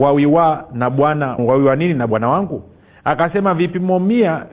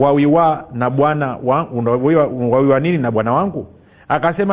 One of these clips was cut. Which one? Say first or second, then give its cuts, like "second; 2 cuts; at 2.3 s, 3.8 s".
first; 1 cut; at 1.4 s